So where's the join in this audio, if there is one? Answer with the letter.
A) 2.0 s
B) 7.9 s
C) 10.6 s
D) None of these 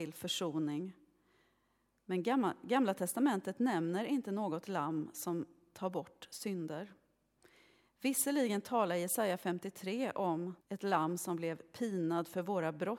C